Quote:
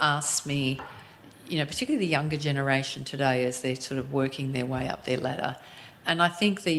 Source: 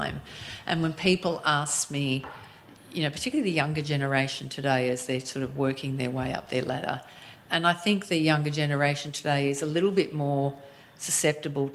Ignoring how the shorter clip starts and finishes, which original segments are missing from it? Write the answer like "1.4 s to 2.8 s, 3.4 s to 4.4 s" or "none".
none